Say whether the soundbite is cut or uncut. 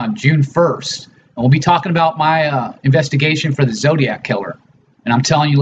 uncut